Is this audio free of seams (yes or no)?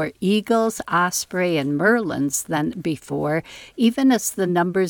yes